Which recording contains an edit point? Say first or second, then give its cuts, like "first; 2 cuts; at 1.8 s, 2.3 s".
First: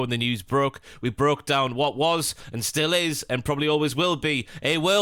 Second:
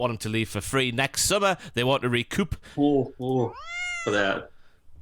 second; 1 cut; at 2.7 s